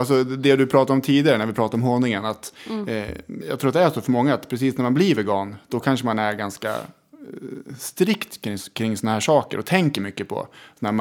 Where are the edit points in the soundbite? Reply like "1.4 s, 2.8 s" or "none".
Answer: 3.4 s